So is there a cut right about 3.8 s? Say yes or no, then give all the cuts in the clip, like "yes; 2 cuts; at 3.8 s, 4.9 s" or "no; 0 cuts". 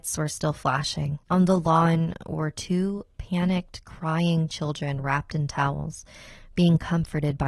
no; 1 cut; at 1.2 s